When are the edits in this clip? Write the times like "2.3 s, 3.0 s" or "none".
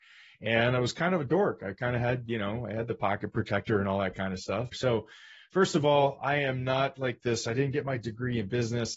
4.7 s